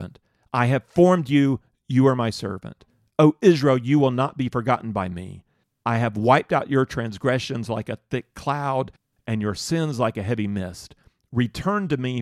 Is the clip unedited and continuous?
yes; 0 cuts

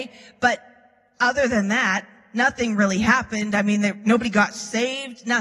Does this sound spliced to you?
no; 0 cuts

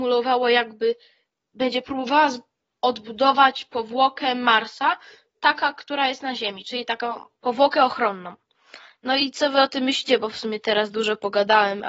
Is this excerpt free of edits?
yes; 0 cuts

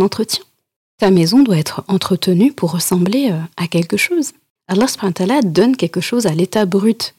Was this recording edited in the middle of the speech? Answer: yes; 1 cut; at 4.6 s

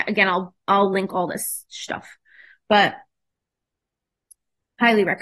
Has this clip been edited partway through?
no; 0 cuts

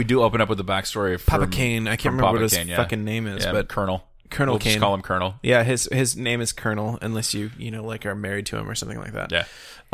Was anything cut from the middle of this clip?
no; 0 cuts

